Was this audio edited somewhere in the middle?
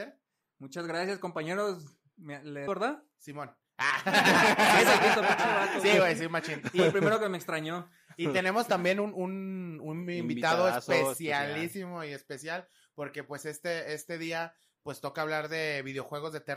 yes; 1 cut; at 2.7 s

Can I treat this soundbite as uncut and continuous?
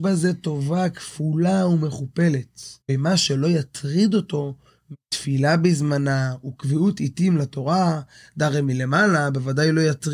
no; 1 cut; at 2.8 s

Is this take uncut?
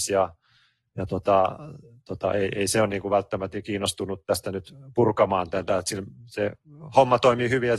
yes; 0 cuts

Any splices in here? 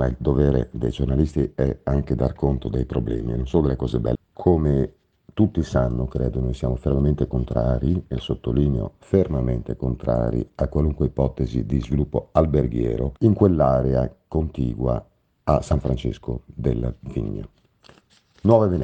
yes; 2 cuts; at 4.1 s, 13.2 s

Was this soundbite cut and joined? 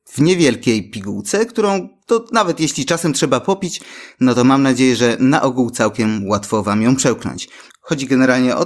yes; 1 cut; at 7.7 s

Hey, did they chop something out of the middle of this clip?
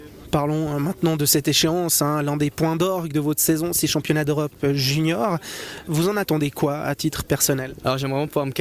no; 0 cuts

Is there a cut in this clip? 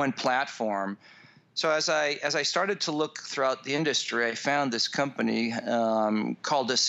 no; 0 cuts

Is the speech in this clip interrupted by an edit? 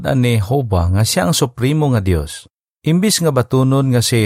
yes; 1 cut; at 2.7 s

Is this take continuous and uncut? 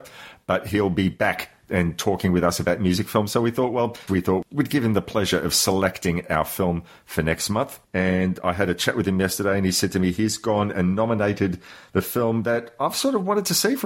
no; 1 cut; at 4.1 s

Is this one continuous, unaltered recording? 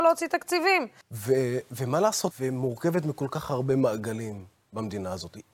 no; 2 cuts; at 1.0 s, 2.3 s

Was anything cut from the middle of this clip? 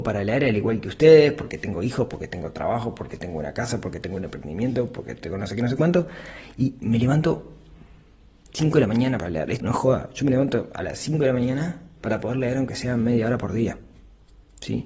yes; 1 cut; at 9.6 s

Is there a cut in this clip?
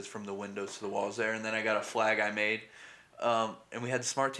no; 0 cuts

